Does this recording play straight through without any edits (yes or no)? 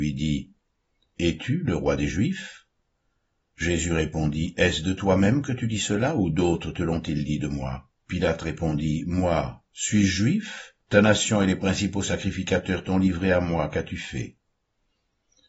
no